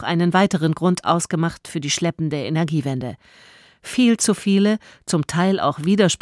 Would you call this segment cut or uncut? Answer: uncut